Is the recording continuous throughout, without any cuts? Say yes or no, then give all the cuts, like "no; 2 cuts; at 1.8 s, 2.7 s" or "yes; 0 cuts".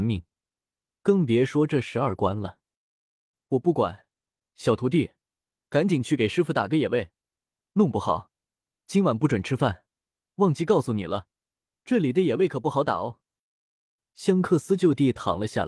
yes; 0 cuts